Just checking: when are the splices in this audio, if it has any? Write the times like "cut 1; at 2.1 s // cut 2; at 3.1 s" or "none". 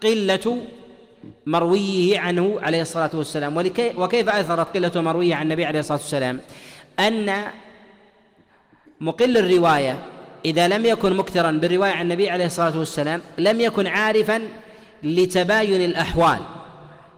none